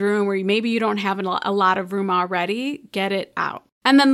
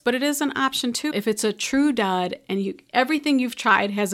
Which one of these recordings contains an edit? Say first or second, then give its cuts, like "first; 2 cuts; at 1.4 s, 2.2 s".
second; 1 cut; at 1.1 s